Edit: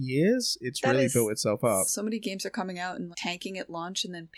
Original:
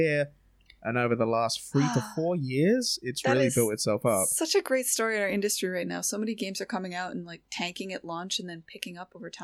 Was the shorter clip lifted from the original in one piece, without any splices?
no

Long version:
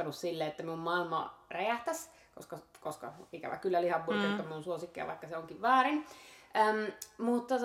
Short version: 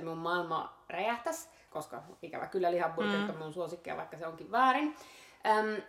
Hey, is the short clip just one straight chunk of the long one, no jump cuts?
no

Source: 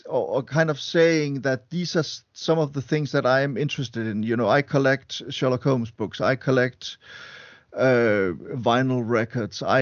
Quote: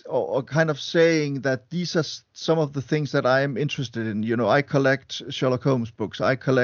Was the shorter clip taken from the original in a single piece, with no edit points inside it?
yes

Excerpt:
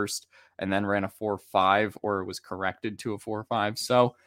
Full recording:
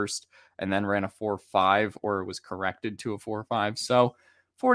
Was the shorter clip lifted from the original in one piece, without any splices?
yes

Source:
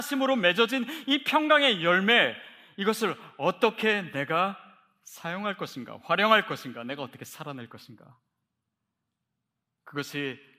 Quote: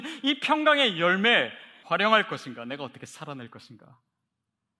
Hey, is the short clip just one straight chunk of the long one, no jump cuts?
no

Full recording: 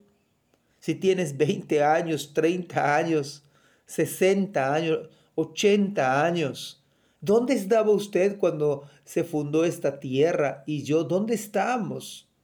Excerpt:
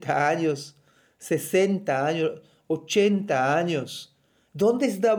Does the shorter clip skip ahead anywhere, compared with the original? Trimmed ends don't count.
no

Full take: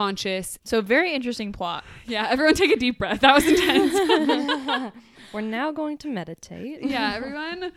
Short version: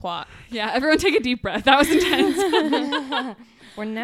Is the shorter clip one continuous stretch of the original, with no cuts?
yes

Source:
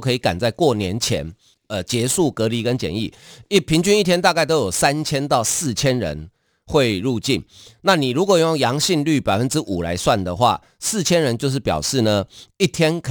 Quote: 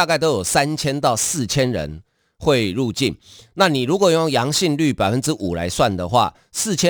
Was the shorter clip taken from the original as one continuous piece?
yes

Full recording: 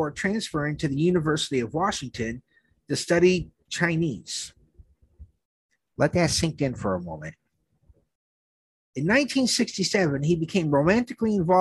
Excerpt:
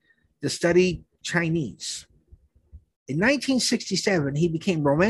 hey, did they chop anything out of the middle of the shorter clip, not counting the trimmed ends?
yes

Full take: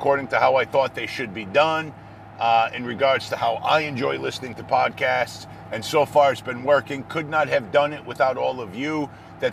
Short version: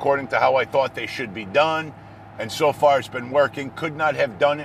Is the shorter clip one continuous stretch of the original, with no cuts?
no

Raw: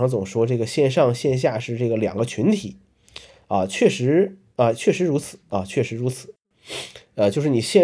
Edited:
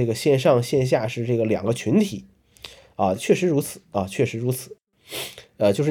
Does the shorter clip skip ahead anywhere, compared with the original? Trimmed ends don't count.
yes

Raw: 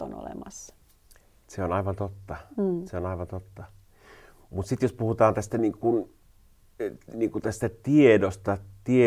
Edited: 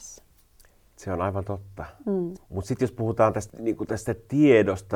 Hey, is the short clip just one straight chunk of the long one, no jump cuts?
no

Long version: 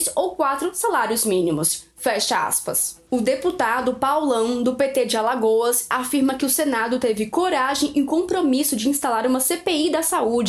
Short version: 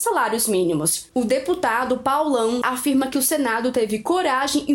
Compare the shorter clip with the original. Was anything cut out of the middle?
yes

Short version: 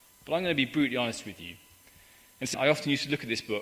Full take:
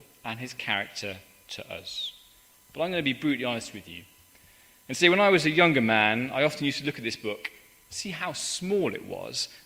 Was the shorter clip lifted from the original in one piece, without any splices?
no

